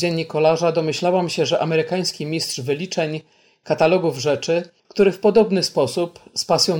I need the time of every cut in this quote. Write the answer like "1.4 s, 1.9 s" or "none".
4.8 s

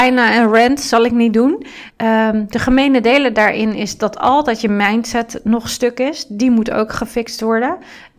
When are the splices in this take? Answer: 1.9 s

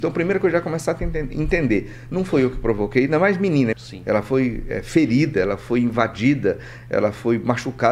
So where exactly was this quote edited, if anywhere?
3.7 s

